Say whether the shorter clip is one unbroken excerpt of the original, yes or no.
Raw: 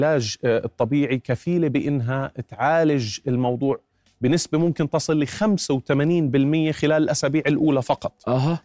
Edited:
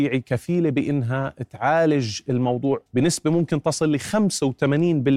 no